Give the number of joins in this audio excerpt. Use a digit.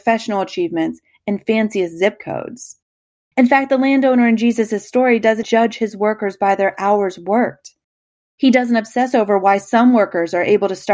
1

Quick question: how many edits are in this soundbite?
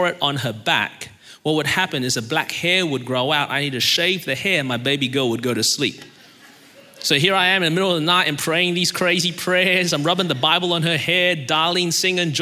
0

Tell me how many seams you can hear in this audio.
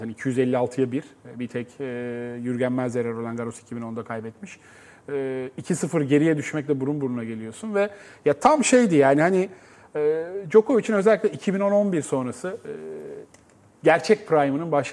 0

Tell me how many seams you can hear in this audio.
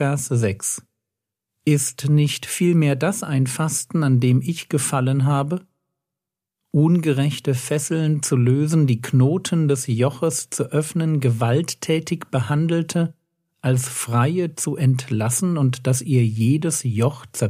0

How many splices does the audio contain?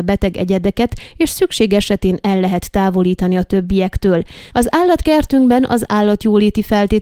1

